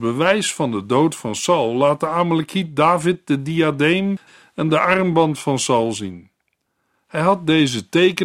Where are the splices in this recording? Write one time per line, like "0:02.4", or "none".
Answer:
none